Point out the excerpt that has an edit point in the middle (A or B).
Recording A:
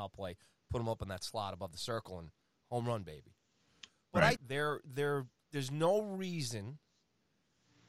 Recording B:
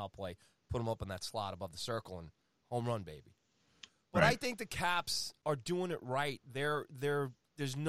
A